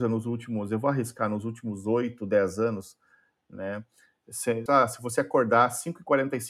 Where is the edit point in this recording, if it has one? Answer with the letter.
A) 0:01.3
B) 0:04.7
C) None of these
B